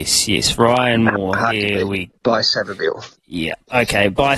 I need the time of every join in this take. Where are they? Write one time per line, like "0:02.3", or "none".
0:03.2

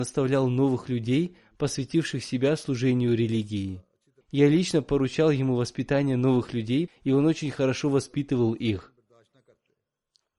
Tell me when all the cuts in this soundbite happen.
0:04.2
0:06.9

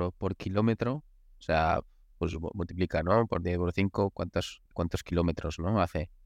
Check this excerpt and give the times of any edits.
0:04.7

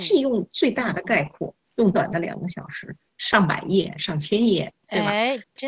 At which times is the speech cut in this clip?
0:01.9
0:03.1

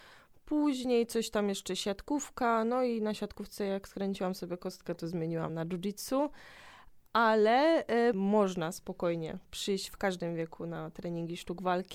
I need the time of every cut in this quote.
0:05.5
0:08.1

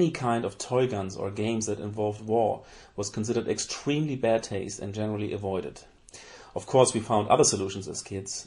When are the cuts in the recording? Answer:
none

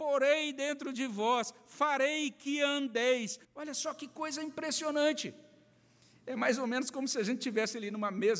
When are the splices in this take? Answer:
0:03.4

